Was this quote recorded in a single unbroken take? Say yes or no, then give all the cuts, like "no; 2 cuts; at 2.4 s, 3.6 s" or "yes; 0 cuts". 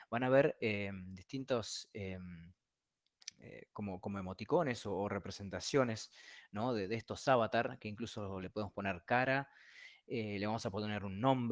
yes; 0 cuts